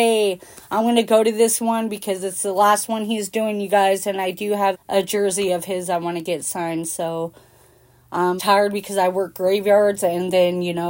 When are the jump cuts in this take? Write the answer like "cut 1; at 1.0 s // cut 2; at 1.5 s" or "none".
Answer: cut 1; at 4.7 s // cut 2; at 8.4 s